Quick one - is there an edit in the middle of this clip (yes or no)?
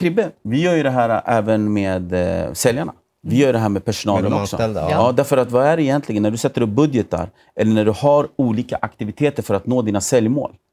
no